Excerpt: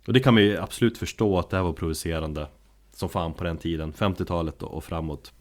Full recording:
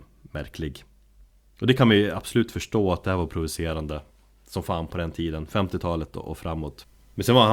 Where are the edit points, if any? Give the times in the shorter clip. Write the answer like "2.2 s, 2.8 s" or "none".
none